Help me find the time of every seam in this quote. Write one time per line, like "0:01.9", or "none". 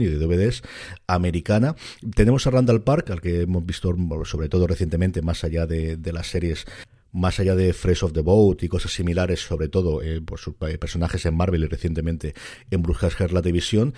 none